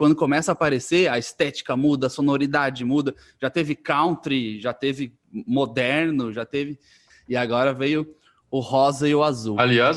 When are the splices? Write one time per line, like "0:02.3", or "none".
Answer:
0:07.1